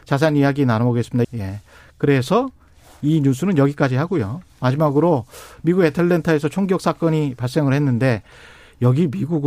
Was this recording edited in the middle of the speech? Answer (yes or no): yes